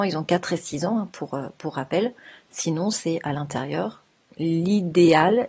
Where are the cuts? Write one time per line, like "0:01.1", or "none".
0:02.5